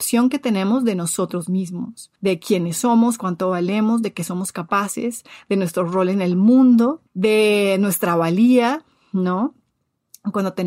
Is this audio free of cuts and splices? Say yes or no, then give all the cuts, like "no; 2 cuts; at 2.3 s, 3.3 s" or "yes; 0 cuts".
no; 2 cuts; at 2.2 s, 7.1 s